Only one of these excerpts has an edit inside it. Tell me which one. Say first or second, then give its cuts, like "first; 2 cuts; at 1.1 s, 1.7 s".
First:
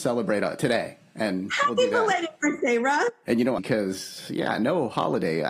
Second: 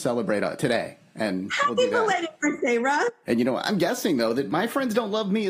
first; 1 cut; at 3.6 s